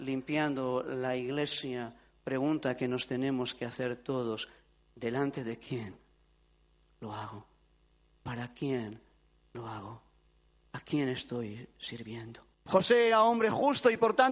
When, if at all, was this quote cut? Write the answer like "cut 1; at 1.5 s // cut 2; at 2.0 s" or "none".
cut 1; at 12.5 s